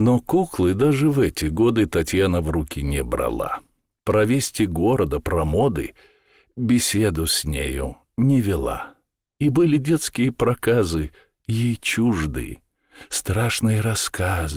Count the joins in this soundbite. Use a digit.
0